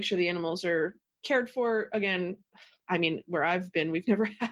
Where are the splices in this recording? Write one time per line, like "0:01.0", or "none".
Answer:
none